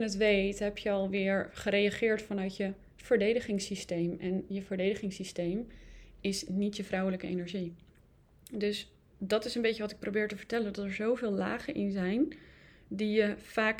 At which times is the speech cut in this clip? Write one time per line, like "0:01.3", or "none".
none

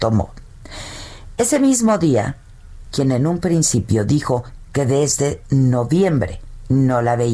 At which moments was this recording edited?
0:02.9

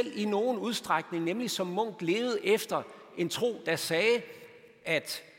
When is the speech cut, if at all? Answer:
none

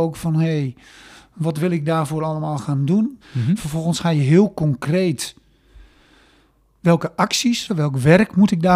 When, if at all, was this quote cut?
0:03.2
0:07.7

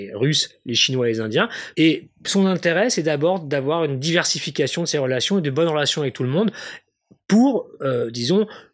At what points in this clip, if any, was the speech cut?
0:01.7

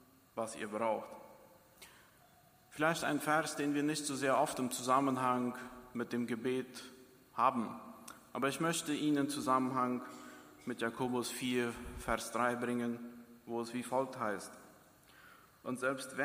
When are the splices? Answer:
none

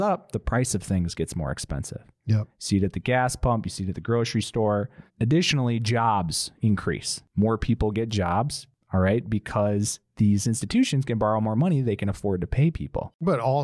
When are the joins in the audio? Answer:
none

